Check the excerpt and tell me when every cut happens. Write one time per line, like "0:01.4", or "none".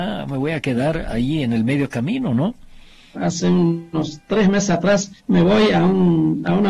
0:03.1
0:05.2